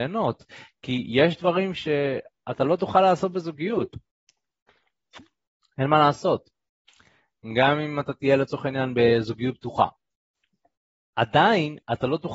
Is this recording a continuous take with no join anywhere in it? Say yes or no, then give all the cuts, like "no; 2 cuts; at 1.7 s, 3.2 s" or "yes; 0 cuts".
yes; 0 cuts